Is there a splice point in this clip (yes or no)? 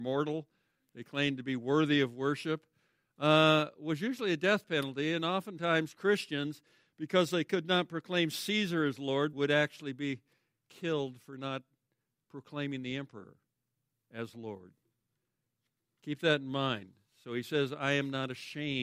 yes